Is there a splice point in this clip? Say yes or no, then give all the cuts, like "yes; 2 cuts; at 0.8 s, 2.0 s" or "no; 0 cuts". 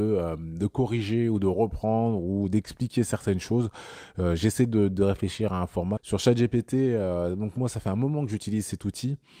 yes; 1 cut; at 6.0 s